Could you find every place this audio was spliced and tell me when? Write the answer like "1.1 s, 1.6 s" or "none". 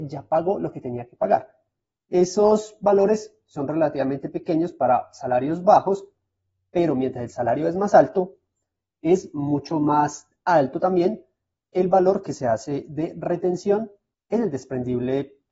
none